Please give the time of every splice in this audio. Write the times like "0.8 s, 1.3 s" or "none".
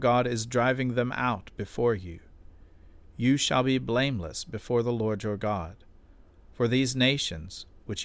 none